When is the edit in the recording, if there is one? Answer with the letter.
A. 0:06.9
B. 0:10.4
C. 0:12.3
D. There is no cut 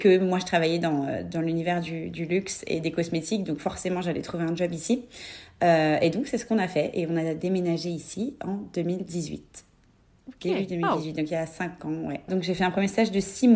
C